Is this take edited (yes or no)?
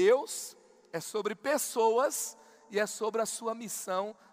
no